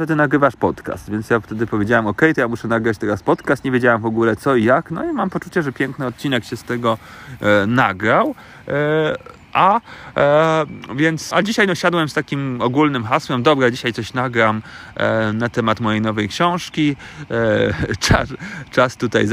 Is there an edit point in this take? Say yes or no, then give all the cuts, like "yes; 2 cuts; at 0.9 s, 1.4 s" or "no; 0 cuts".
yes; 1 cut; at 11.3 s